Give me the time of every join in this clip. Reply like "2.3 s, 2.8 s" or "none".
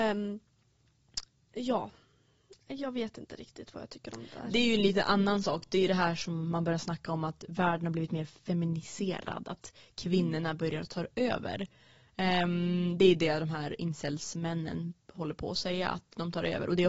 none